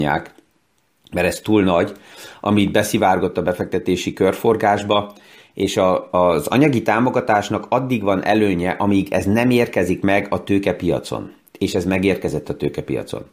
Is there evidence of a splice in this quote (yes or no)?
no